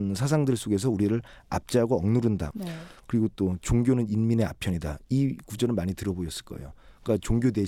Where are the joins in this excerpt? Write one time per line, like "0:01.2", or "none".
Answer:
0:02.5

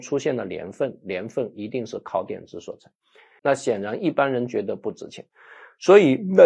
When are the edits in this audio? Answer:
0:03.4

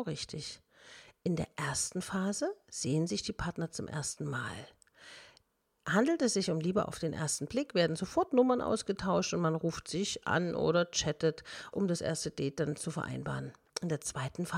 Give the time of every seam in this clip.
0:11.7

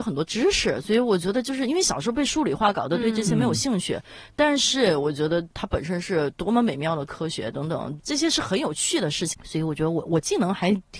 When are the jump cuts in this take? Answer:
0:09.3

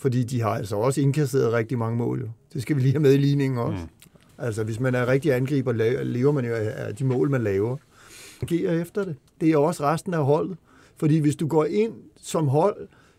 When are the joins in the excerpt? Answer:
0:04.3
0:08.4

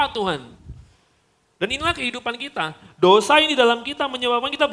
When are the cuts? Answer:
none

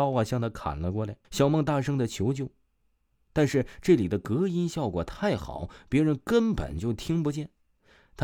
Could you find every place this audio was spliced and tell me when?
0:01.2

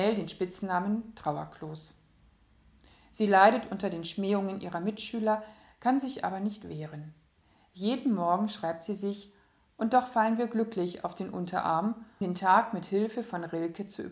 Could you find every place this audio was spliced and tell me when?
0:12.2

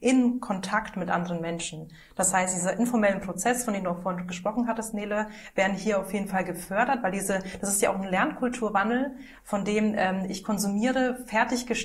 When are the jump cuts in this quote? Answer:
none

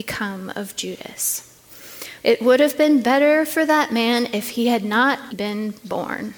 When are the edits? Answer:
0:02.2
0:05.3

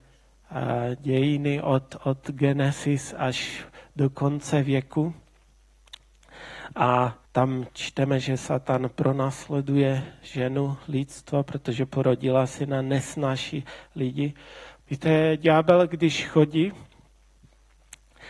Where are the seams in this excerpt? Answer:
0:07.3
0:14.8

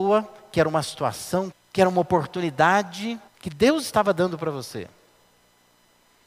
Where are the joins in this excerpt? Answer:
0:01.5
0:03.3

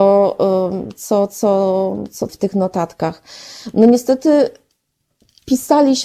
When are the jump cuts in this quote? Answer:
0:02.3

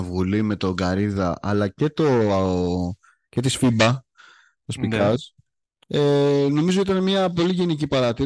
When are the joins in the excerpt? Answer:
none

